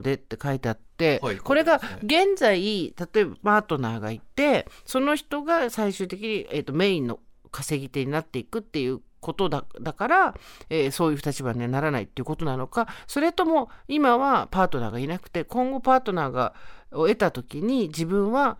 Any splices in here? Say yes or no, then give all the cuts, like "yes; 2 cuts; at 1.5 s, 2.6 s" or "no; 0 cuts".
no; 0 cuts